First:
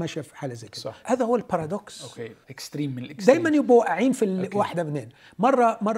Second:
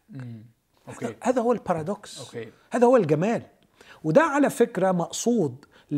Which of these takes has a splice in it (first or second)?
first